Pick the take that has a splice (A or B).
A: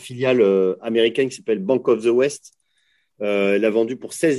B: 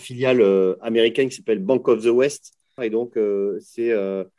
B